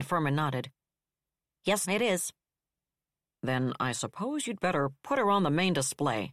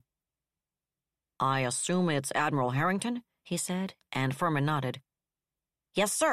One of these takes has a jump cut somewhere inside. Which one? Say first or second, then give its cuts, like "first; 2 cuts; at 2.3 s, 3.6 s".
first; 1 cut; at 1.8 s